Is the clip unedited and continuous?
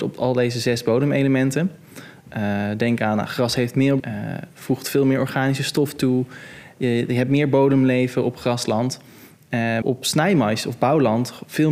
no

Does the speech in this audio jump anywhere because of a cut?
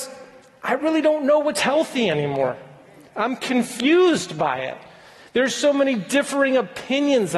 no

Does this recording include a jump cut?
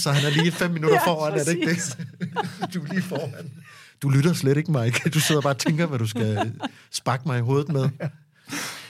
no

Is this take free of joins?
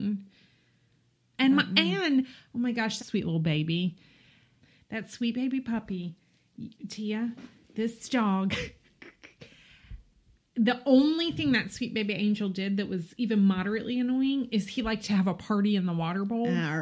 no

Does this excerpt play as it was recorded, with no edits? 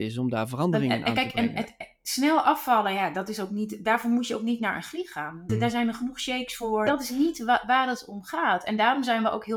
no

